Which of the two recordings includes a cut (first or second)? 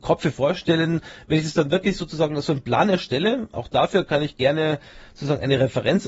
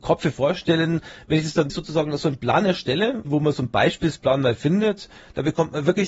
second